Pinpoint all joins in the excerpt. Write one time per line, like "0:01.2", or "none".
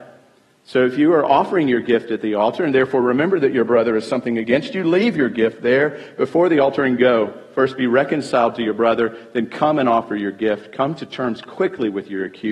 none